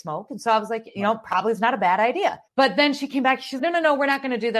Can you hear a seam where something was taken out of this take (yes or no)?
yes